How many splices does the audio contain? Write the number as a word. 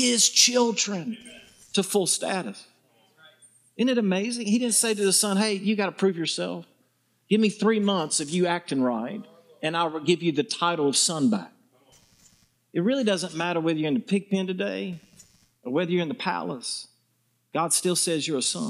zero